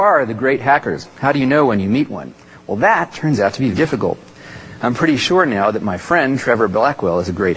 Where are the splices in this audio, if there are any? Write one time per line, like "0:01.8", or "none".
0:03.7